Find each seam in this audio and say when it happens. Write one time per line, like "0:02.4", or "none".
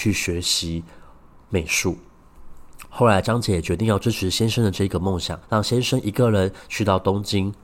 0:05.4